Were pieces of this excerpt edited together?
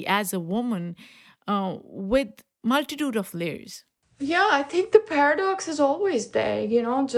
no; 0 cuts

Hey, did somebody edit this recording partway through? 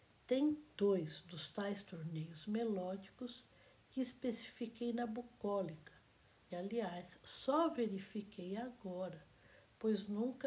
yes; 1 cut; at 6.5 s

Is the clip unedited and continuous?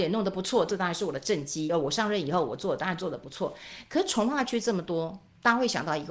yes; 0 cuts

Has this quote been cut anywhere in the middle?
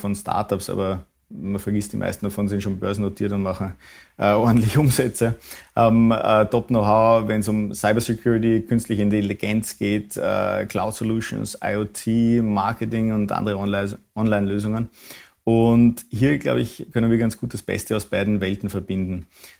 no; 0 cuts

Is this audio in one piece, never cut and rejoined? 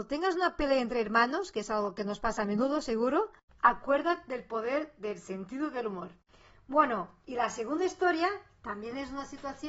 yes; 0 cuts

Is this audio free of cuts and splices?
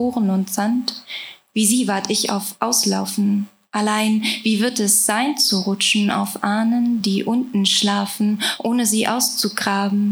yes; 0 cuts

